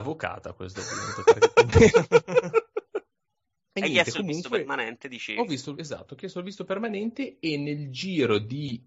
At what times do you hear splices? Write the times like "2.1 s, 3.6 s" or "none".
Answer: 3.7 s, 5.8 s